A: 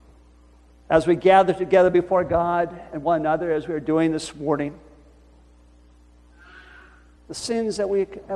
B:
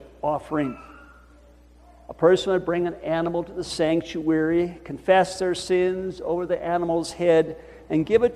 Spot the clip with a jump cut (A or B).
A